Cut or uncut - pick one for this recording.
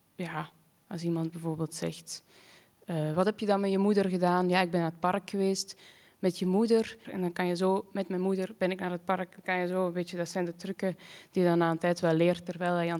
cut